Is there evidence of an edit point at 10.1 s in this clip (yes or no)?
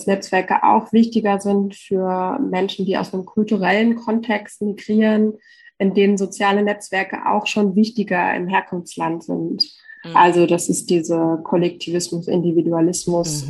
no